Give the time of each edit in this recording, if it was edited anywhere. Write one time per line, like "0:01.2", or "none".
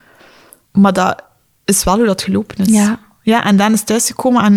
none

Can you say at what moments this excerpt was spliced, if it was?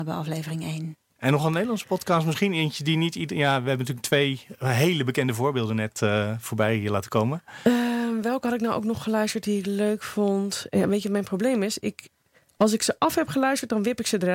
0:01.2

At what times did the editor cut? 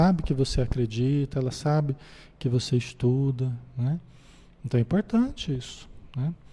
none

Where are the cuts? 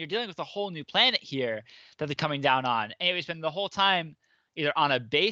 none

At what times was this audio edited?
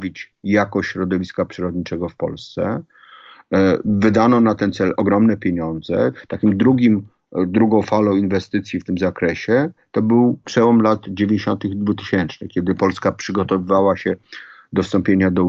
none

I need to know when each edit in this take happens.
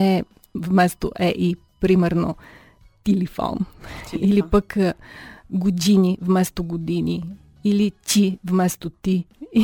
none

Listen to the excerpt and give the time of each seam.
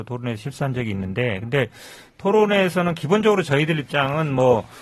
none

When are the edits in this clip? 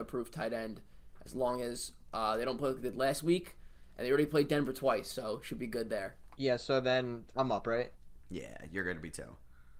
0:06.4

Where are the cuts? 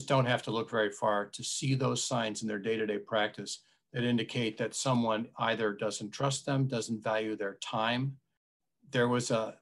none

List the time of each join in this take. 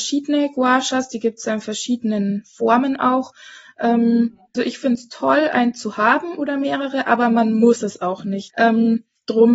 0:04.5
0:08.5

